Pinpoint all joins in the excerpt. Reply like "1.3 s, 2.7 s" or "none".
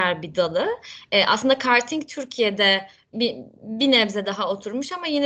3.1 s